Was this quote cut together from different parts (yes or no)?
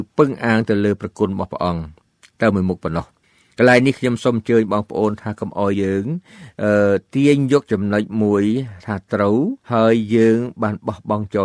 yes